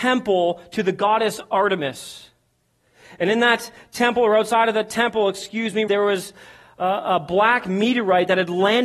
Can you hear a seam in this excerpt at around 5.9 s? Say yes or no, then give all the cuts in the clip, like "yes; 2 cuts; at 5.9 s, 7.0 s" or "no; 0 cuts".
yes; 1 cut; at 5.9 s